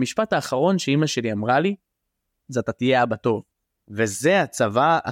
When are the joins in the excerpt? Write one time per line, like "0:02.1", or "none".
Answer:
none